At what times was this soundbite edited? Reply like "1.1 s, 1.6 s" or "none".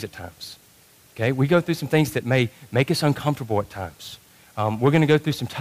none